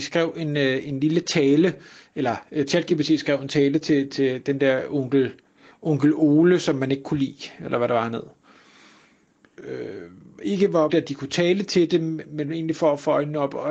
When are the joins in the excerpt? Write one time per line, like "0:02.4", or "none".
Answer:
0:09.6
0:10.9